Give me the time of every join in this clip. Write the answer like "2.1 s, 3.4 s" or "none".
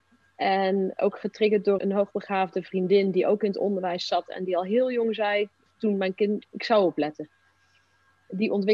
1.8 s, 6.4 s